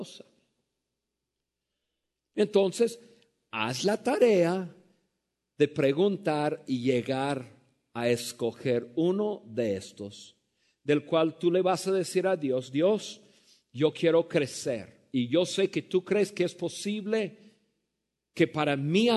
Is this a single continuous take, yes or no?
yes